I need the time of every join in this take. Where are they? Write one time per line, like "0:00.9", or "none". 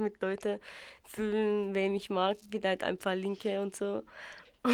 none